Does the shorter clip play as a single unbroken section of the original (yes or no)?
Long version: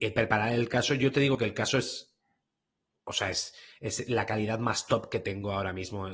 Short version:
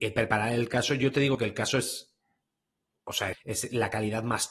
no